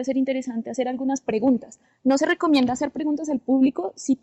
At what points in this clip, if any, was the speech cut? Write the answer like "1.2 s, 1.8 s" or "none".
none